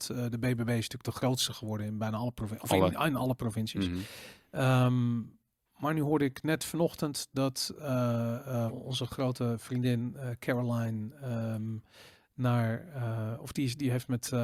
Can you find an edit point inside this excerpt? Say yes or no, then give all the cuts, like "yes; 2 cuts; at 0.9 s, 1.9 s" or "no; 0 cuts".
yes; 1 cut; at 8.7 s